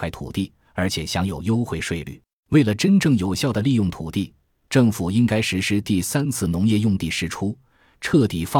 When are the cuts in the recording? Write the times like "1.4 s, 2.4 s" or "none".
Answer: 2.4 s

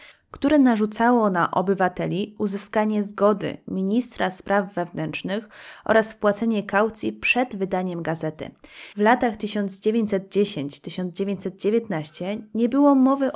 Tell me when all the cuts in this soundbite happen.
8.9 s

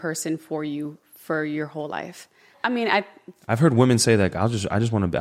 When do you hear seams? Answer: 2.5 s

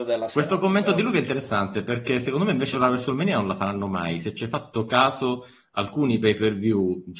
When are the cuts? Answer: 2.7 s

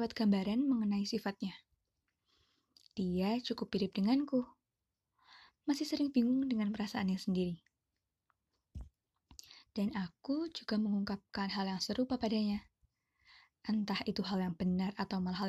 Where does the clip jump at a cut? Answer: 9.7 s

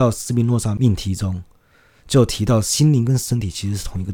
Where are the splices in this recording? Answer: none

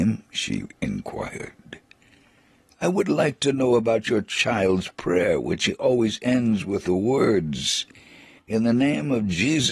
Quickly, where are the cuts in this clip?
none

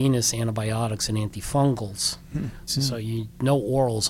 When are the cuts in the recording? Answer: 2.7 s

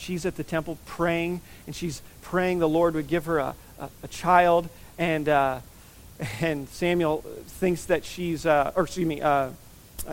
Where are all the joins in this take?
none

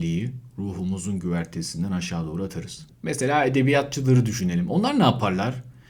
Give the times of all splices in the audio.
2.9 s

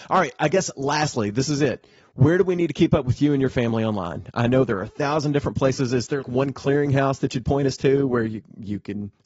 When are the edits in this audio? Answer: 6.2 s

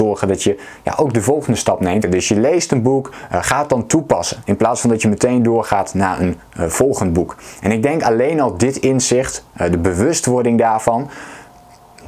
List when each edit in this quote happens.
2.0 s

